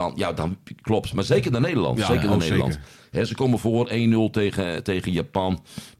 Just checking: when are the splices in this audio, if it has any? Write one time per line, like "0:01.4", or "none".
0:04.8